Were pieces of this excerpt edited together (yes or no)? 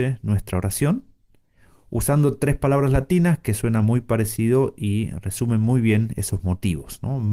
no